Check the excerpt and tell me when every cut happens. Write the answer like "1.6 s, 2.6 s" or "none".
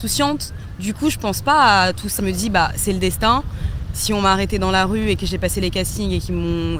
2.2 s